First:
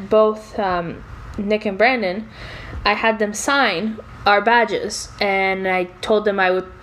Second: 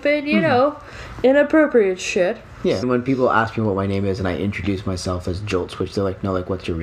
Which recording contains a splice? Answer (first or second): second